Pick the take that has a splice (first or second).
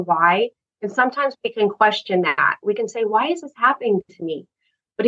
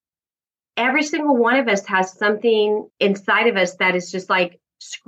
second